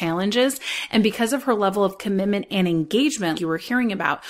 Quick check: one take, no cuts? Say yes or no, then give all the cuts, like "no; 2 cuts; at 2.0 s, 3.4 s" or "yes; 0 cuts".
no; 1 cut; at 3.3 s